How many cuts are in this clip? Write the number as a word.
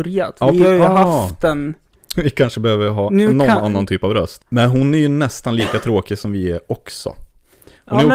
two